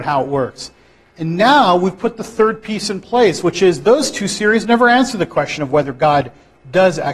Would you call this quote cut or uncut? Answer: uncut